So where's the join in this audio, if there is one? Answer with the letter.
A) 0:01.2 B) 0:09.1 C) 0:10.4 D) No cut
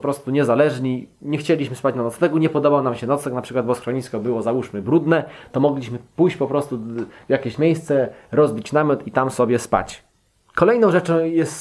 C